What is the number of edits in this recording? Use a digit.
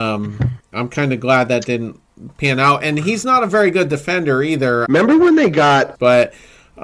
2